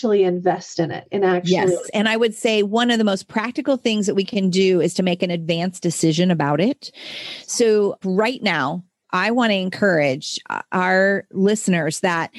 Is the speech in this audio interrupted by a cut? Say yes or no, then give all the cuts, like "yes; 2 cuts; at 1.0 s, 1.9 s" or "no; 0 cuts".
yes; 2 cuts; at 1.8 s, 8.0 s